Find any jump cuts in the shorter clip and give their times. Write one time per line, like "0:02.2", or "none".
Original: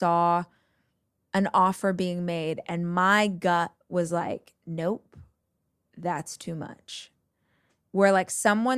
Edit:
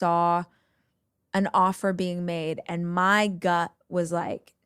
none